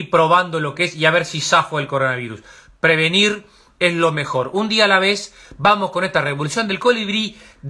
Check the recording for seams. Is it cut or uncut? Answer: uncut